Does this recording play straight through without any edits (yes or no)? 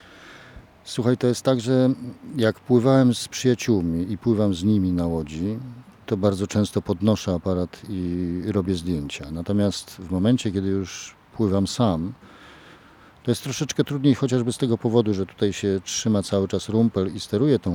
yes